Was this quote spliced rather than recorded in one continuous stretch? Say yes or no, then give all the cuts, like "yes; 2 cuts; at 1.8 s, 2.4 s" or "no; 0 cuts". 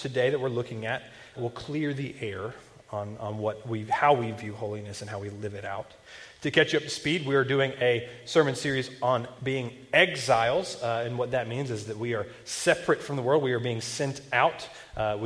yes; 1 cut; at 1.4 s